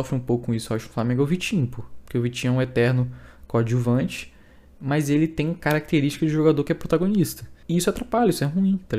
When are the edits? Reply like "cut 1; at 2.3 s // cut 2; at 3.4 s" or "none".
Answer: cut 1; at 7.6 s

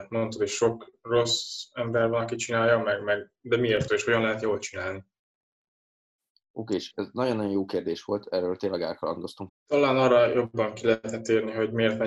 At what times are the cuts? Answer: cut 1; at 3.9 s // cut 2; at 9.5 s

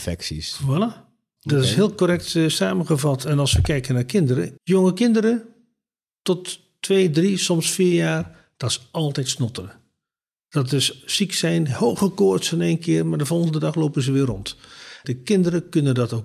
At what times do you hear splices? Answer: cut 1; at 4.6 s // cut 2; at 15.0 s

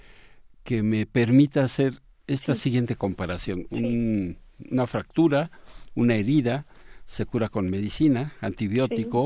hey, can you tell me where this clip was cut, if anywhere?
cut 1; at 3.7 s

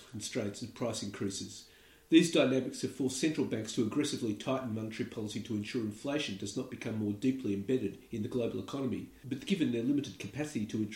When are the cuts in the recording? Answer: none

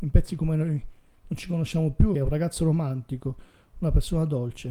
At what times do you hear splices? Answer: cut 1; at 2.1 s

